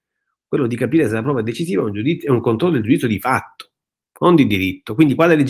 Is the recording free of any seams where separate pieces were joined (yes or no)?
yes